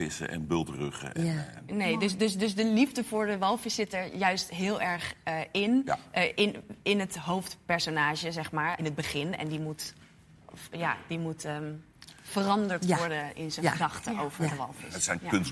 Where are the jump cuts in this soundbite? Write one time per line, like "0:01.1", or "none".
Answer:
0:08.8
0:13.3